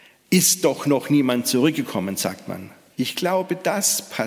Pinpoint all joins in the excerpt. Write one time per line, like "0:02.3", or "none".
0:02.9